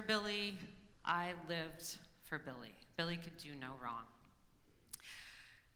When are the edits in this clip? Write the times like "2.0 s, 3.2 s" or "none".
0.9 s